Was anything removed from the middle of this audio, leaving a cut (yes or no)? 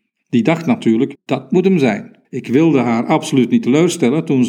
yes